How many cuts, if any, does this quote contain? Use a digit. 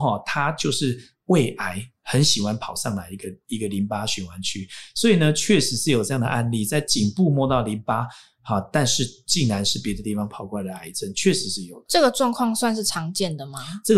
0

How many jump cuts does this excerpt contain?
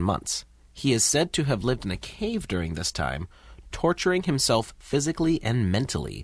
0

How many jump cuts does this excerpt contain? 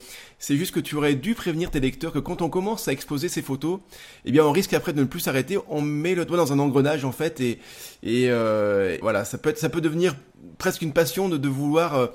1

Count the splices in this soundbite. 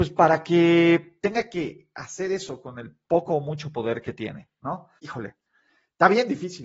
1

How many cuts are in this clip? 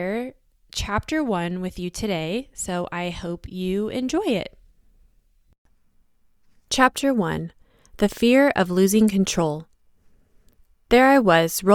0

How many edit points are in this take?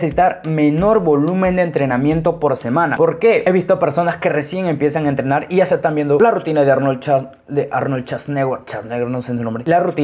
1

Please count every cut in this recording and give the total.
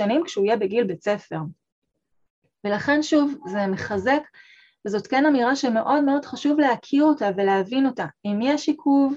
0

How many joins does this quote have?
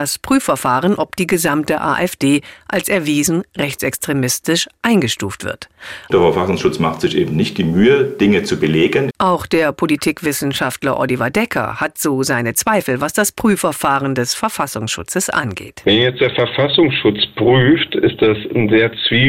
2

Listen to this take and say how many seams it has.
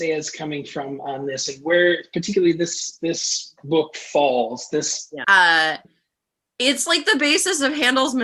1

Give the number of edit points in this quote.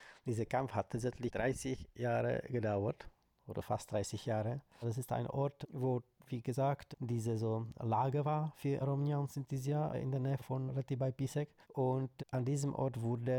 0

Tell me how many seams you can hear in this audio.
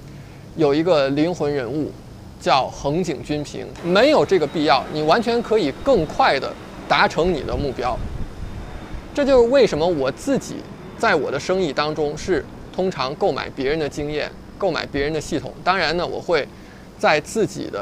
1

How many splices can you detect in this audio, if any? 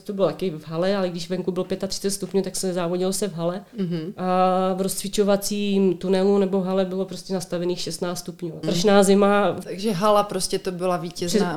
2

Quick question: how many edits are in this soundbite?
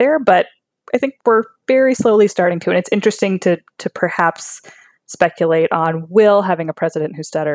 1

